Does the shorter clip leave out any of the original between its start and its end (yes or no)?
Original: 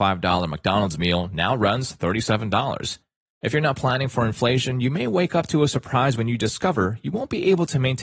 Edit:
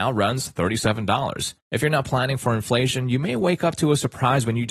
yes